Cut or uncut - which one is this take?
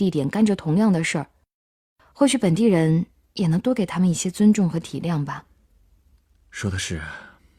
uncut